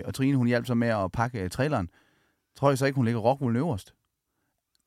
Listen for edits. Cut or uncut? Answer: uncut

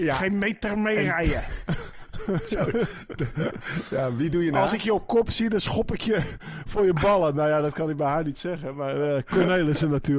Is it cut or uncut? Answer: cut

